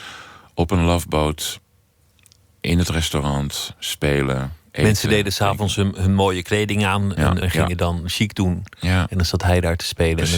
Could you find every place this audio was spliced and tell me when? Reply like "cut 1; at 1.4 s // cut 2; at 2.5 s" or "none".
cut 1; at 7.4 s